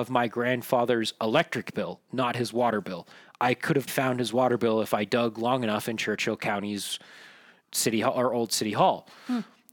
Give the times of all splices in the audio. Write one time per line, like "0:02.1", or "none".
0:03.9